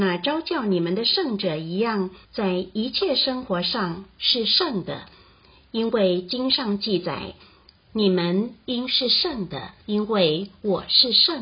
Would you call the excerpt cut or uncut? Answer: cut